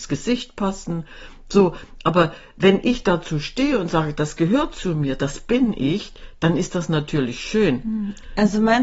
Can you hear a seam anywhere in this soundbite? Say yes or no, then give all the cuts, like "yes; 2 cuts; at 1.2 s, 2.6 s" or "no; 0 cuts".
no; 0 cuts